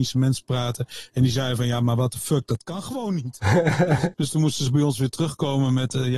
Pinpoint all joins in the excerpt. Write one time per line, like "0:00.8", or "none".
0:04.1